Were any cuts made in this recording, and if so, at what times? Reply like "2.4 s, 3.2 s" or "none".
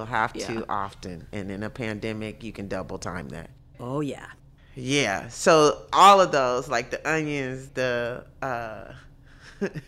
3.7 s, 7.7 s